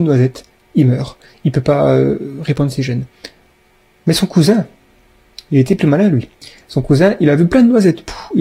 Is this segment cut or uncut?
uncut